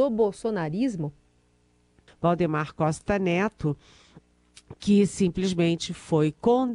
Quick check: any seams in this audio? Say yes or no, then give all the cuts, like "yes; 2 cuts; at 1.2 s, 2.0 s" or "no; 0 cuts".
yes; 1 cut; at 2.1 s